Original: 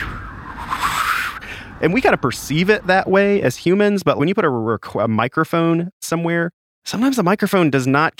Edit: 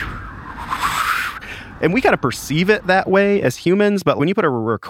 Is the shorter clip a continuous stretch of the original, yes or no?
yes